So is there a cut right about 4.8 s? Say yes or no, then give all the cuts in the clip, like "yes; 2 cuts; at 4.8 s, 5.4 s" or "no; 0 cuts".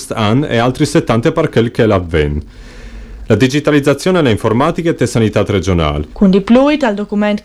no; 2 cuts; at 3.2 s, 6.1 s